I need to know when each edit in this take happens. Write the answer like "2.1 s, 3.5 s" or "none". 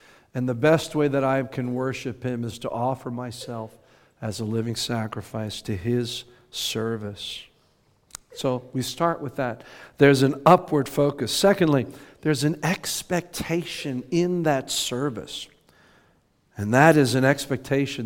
none